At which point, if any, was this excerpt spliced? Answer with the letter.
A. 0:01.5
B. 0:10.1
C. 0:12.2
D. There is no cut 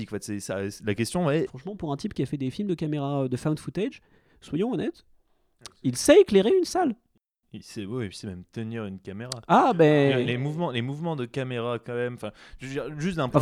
A